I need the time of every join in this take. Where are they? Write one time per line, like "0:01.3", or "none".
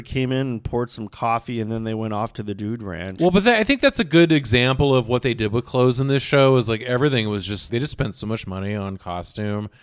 0:07.7